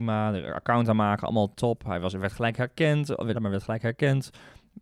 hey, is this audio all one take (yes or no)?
no